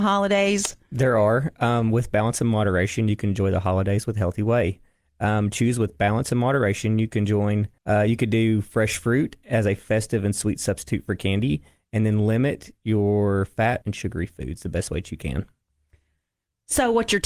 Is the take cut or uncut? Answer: cut